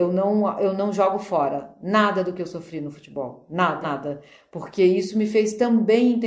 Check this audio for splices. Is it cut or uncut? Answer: cut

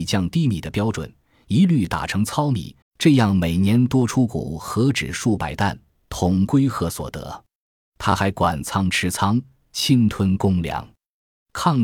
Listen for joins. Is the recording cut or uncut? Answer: cut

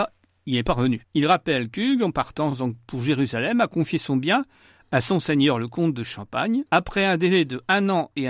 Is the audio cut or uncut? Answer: uncut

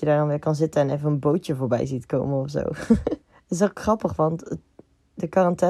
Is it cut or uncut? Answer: cut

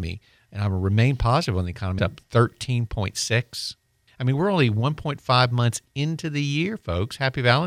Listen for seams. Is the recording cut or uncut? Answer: cut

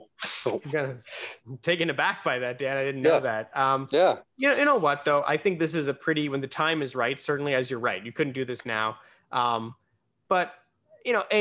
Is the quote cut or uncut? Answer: uncut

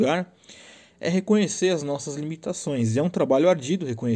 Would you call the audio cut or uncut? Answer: uncut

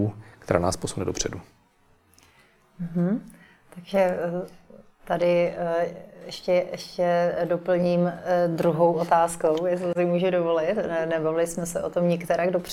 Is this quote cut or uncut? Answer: uncut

